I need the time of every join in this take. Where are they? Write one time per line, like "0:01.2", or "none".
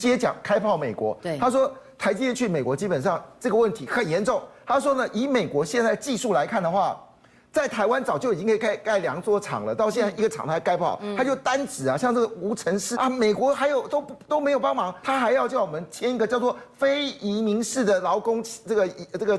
0:12.9
0:15.0